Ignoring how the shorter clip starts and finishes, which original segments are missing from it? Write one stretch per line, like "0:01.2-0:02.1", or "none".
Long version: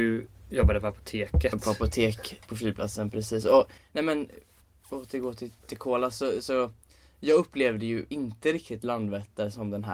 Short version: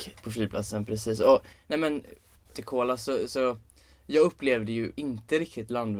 0:04.7-0:05.6